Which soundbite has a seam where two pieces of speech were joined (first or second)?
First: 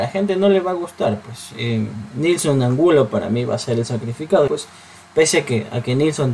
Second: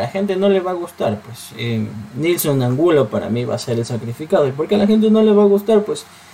first